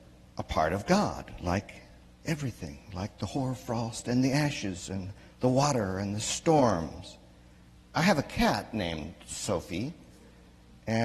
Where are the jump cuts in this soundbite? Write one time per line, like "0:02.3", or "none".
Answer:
none